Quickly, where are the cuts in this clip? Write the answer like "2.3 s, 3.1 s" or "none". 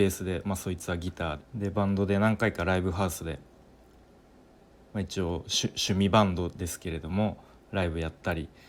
1.4 s